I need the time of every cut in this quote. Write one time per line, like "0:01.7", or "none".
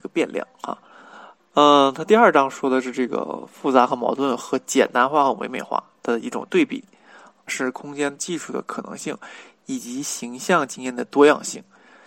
0:07.5